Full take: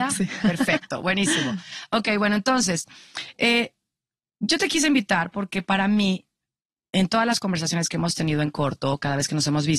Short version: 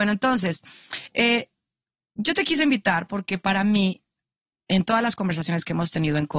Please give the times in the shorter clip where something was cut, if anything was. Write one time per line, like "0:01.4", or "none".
none